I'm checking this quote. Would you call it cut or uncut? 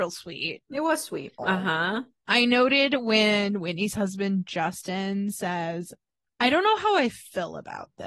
cut